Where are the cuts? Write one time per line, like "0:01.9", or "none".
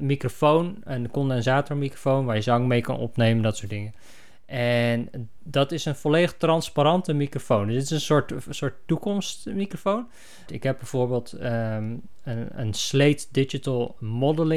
0:10.5

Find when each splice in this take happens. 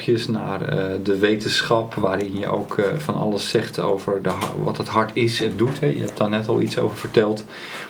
none

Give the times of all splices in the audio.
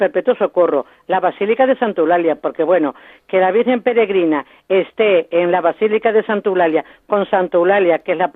none

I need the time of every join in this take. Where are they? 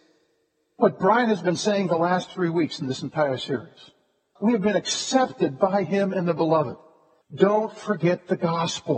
0:04.4
0:07.2

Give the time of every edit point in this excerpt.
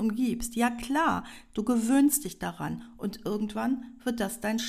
none

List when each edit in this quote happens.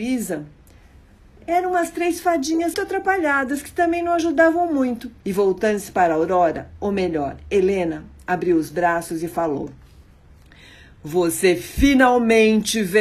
0:02.7
0:05.2

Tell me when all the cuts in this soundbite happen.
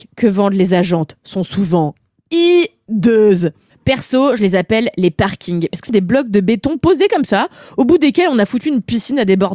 0:05.9

